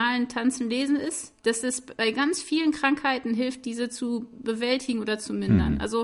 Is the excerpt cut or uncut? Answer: cut